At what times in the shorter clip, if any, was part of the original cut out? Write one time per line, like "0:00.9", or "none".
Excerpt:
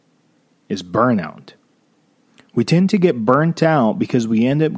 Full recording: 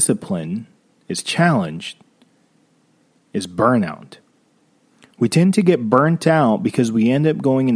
none